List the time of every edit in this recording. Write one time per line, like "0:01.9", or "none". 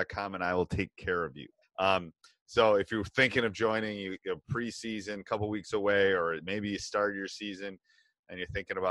0:01.6